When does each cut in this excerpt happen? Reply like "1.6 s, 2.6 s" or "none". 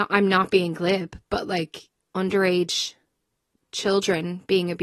2.0 s